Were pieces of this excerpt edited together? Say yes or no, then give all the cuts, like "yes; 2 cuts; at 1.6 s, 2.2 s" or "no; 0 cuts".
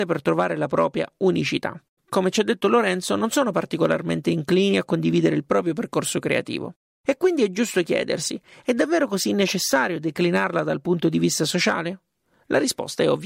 yes; 1 cut; at 2.0 s